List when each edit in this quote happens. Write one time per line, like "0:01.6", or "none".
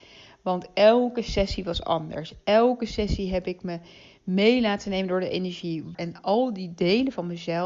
0:05.9